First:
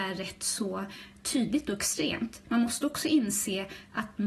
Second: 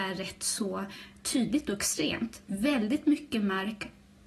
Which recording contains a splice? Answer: first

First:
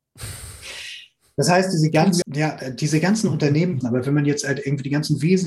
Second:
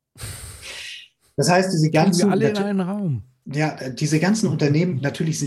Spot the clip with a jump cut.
first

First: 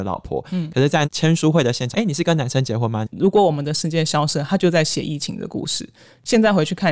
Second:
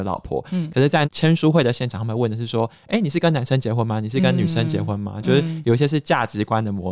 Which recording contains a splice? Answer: first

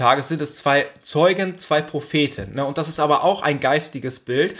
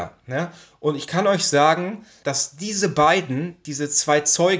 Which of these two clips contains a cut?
second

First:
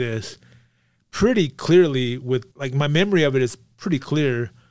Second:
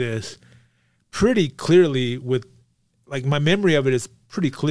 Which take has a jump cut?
first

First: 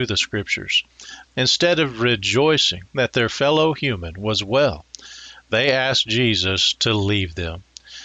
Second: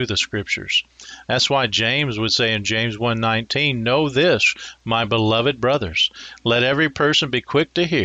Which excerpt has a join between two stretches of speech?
first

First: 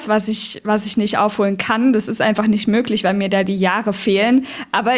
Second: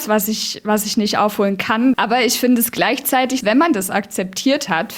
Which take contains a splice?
second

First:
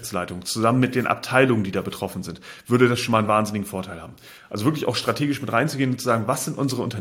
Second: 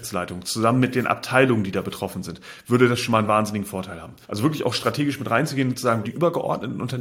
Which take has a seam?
second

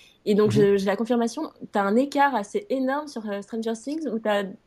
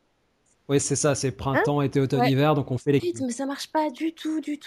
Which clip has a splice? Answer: second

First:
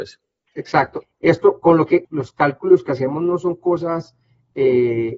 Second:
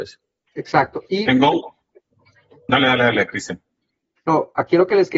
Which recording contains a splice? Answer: first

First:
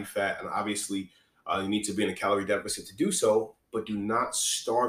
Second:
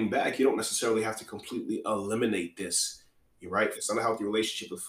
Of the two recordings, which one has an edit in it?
second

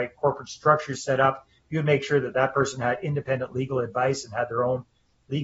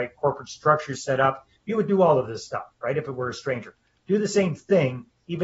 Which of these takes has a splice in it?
second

